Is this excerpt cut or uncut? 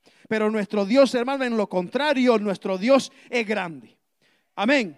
uncut